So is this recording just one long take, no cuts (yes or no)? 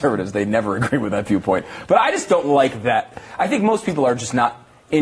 yes